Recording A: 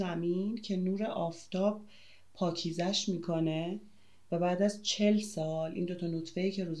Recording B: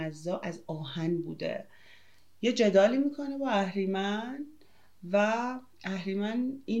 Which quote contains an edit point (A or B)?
B